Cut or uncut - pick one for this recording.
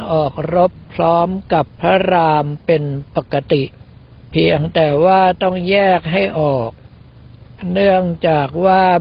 uncut